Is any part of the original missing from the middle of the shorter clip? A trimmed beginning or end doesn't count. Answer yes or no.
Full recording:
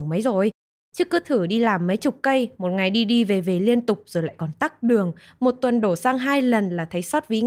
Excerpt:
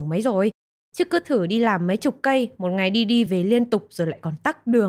yes